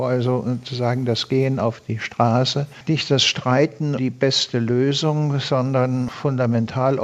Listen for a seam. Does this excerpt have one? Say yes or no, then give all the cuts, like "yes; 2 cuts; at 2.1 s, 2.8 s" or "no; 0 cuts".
yes; 1 cut; at 4.0 s